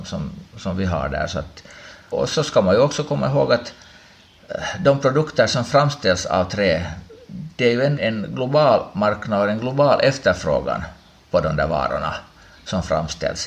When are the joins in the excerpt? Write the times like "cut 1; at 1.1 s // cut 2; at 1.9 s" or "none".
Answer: cut 1; at 2.1 s // cut 2; at 8.0 s